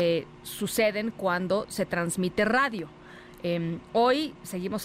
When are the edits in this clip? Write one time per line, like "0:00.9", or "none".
none